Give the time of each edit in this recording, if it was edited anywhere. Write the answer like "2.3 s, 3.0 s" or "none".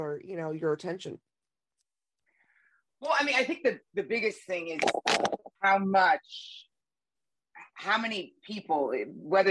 5.6 s